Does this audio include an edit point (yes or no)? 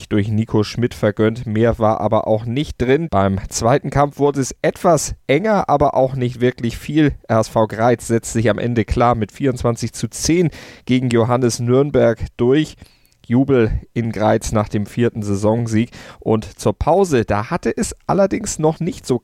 yes